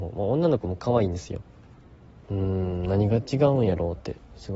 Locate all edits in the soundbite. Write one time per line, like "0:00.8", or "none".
0:02.2

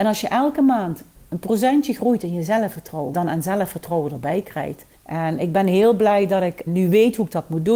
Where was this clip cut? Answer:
0:03.1
0:04.9
0:06.7

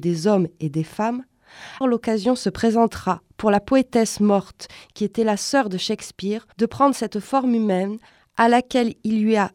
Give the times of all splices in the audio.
0:01.8
0:06.5

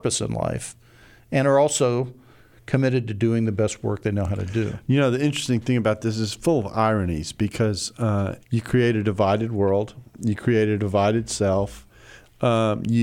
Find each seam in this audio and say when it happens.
0:08.4

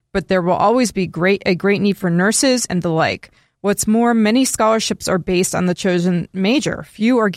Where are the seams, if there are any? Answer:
0:02.7

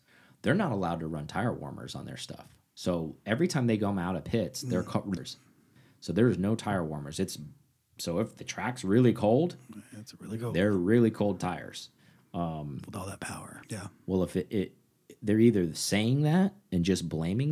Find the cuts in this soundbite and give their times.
0:05.2
0:13.6

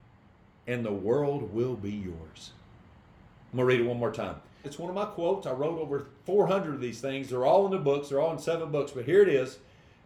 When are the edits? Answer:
0:04.6

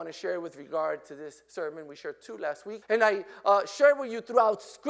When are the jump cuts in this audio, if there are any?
0:02.8

